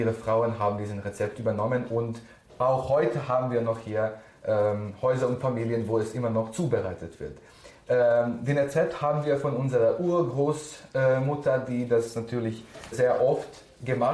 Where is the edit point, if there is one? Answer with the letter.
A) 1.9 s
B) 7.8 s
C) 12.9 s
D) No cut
C